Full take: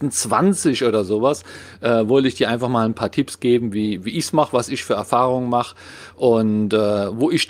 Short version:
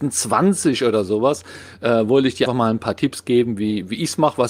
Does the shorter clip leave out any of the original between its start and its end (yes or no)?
yes